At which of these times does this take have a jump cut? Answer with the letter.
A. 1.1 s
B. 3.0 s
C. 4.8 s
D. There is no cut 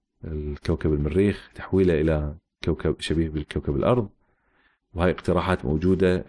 B